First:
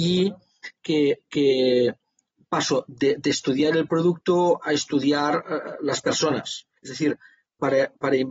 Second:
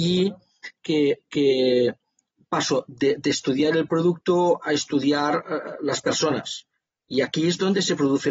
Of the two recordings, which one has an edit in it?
first; 1 cut; at 6.8 s

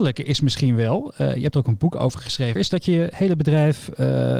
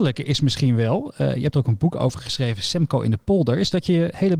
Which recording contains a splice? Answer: first; 1 cut; at 2.6 s

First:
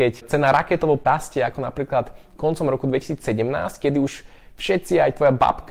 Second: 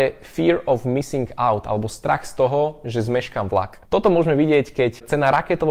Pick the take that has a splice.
second; 1 cut; at 3.9 s

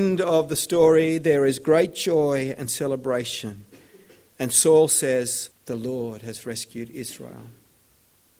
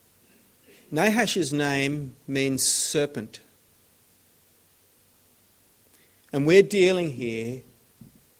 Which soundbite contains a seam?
first; 1 cut; at 5.5 s

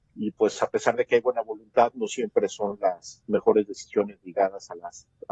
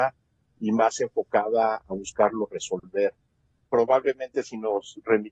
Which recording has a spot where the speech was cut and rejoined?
second; 1 cut; at 3.7 s

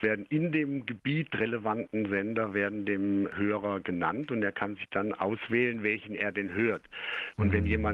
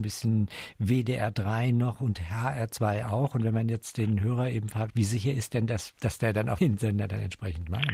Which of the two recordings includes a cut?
second; 2 cuts; at 4.9 s, 6.6 s

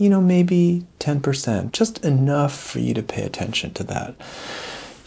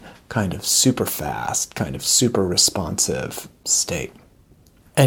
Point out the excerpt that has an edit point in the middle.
first; 1 cut; at 1.7 s

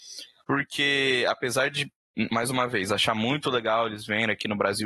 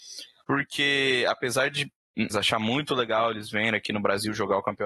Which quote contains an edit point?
second; 1 cut; at 2.3 s

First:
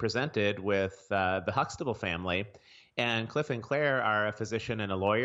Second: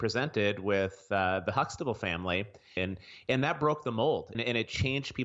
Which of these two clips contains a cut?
second; 2 cuts; at 2.8 s, 4.3 s

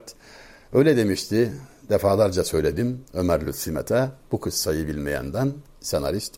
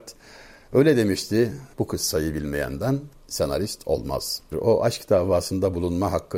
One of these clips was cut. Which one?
second; 2 cuts; at 1.7 s, 4.5 s

